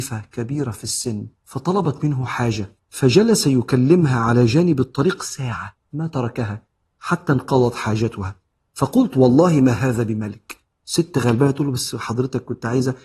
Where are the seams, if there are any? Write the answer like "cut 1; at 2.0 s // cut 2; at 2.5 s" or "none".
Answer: cut 1; at 1.4 s // cut 2; at 2.8 s